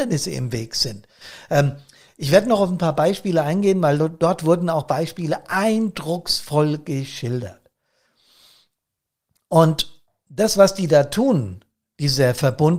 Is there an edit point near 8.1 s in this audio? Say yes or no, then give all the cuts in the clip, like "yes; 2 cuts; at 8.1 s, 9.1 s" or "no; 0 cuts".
no; 0 cuts